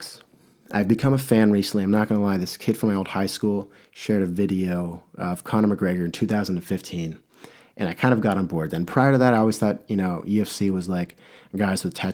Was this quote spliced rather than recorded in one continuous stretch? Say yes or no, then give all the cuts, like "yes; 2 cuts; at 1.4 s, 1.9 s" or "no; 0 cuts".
no; 0 cuts